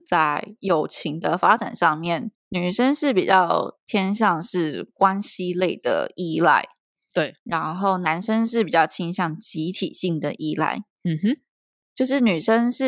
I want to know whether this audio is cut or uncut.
uncut